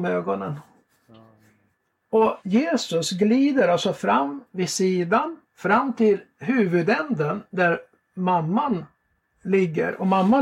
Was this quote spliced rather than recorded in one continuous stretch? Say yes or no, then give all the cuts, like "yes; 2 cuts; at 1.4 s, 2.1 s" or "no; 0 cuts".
yes; 2 cuts; at 2.4 s, 5.4 s